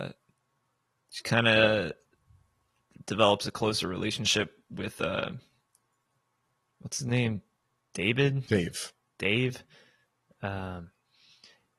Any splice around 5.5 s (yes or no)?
no